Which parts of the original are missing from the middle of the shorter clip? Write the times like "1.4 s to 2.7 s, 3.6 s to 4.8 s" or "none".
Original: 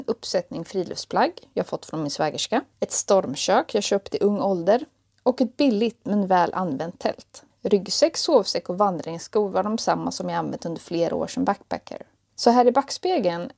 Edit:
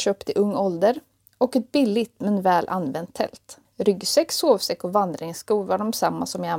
none